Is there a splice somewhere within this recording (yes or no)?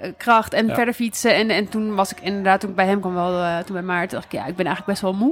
no